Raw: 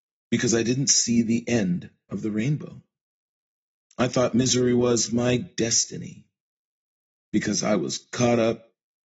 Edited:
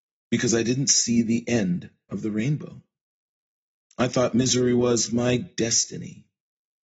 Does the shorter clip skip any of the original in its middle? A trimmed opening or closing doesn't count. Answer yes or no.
no